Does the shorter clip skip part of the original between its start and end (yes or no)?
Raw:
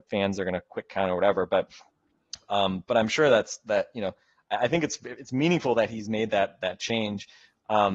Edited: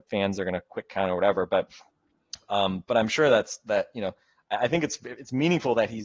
no